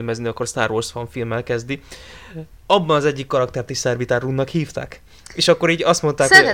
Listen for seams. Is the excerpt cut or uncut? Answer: uncut